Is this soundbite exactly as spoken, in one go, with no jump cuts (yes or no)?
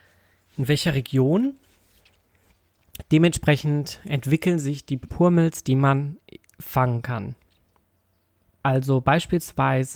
yes